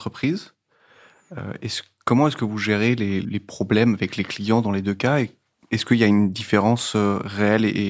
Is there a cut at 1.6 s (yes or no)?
no